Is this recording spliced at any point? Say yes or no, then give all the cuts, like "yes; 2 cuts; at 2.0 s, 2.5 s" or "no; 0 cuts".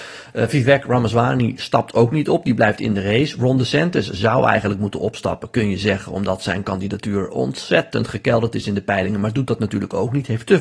no; 0 cuts